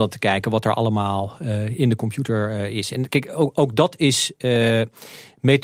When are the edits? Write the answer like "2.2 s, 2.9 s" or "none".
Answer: none